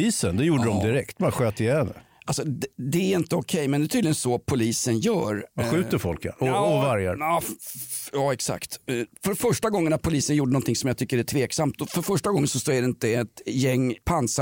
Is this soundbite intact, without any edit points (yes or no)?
yes